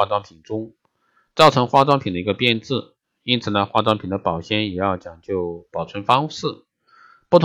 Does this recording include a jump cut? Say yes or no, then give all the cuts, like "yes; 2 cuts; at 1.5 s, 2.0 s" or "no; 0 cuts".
no; 0 cuts